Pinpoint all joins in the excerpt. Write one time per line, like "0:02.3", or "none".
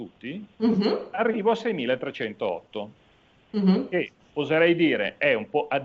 none